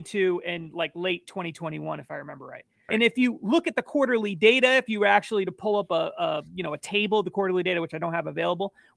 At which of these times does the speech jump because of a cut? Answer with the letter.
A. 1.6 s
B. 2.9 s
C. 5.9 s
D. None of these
B